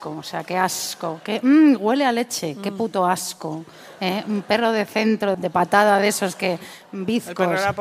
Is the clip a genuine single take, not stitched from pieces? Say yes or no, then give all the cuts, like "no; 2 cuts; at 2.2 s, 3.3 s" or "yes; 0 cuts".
no; 1 cut; at 5.3 s